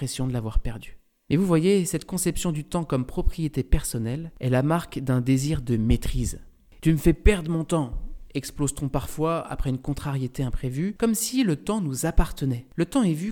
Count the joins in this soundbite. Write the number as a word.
one